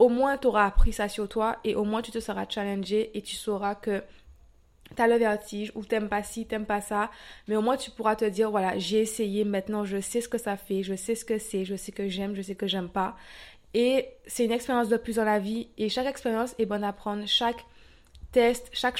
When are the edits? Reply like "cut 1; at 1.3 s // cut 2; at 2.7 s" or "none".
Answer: none